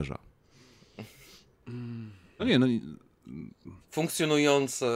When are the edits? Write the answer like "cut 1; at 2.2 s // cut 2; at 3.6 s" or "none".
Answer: cut 1; at 2.4 s // cut 2; at 3.8 s